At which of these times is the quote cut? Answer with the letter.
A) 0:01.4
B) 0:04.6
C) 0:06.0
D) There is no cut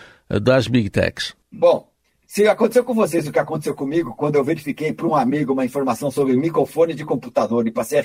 A